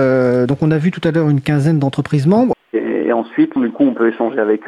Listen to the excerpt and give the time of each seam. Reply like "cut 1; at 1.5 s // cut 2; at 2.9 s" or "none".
cut 1; at 2.5 s // cut 2; at 3.6 s